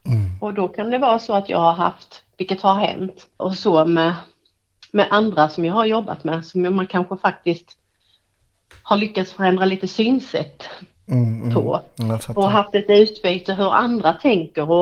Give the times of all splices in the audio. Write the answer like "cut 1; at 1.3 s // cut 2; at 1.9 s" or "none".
cut 1; at 3.4 s